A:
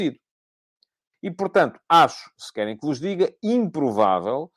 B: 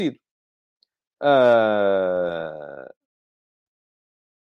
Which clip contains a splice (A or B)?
A